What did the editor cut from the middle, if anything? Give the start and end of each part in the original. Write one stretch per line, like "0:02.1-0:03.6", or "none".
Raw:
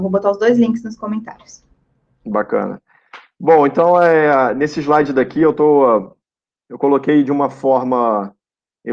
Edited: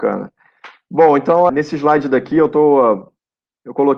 0:04.0-0:04.5